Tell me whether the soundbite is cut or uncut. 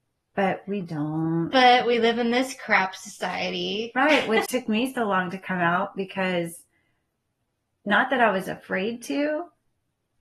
cut